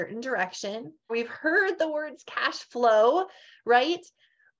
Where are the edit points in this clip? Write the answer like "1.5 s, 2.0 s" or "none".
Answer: 1.1 s